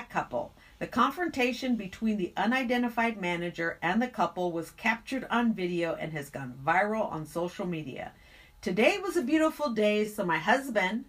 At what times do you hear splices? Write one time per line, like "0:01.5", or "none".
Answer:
none